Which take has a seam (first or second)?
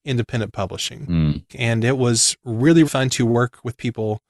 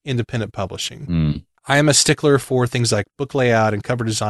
first